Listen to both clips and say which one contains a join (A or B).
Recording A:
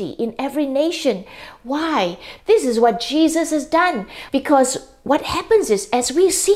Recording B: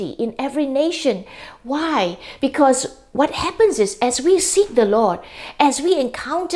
A